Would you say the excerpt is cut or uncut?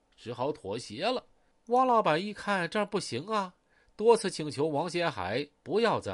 cut